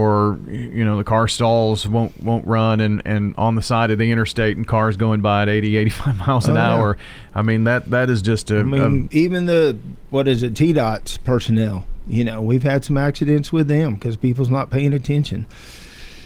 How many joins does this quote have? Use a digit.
1